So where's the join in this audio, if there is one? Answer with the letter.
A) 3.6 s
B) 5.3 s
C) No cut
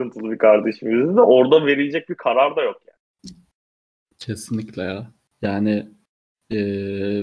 C